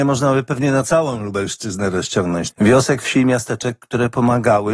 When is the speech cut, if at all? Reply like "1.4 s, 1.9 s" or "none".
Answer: 2.5 s